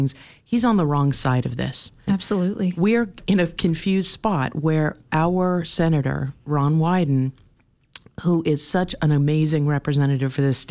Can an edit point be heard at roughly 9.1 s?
no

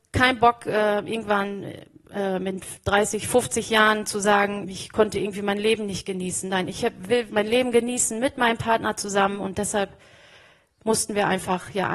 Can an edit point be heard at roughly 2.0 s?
no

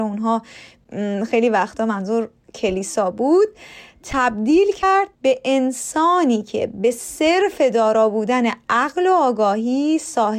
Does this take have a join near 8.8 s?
no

